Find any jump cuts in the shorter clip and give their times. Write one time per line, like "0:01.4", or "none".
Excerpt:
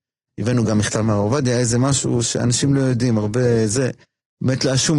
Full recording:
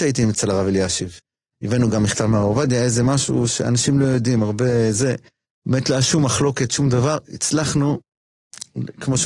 none

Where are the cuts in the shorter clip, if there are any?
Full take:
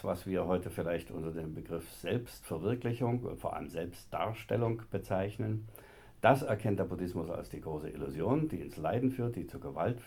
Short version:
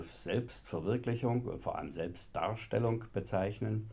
none

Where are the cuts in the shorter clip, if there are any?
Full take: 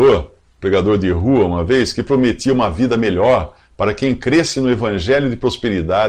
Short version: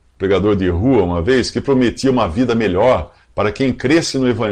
none

